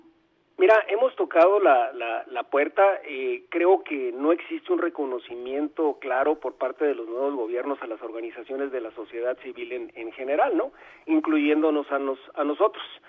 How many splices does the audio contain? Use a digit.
0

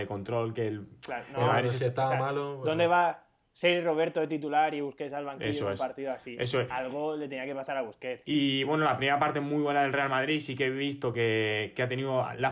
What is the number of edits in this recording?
0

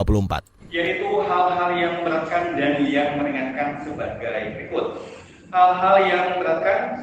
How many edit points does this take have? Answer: 0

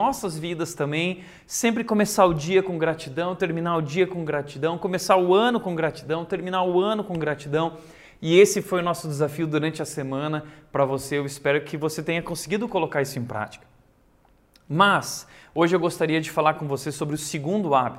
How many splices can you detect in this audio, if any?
0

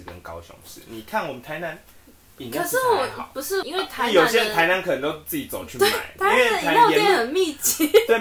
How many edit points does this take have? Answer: 1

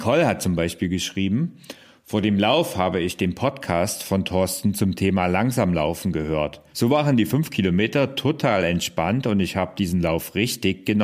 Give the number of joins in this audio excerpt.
1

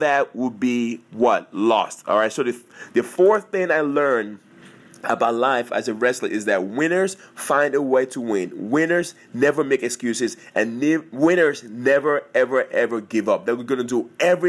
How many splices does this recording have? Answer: 0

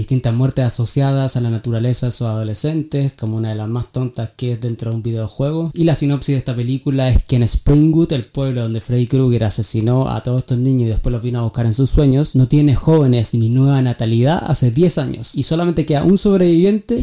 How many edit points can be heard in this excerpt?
2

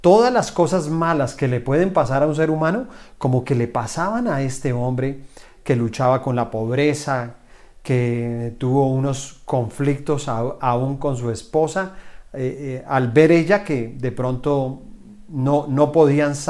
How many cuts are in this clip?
0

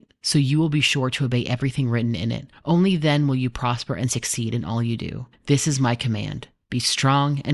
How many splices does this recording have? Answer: 0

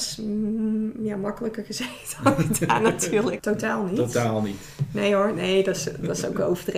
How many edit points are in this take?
1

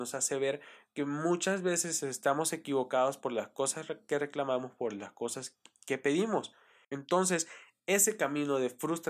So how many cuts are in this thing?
1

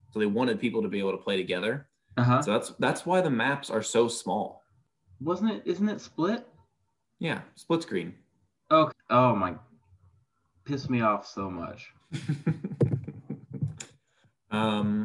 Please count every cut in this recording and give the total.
1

